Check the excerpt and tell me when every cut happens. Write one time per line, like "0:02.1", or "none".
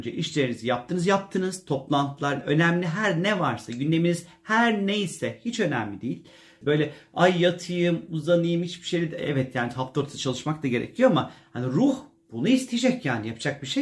0:02.4
0:06.6